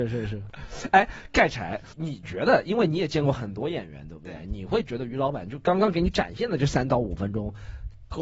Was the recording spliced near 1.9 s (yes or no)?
yes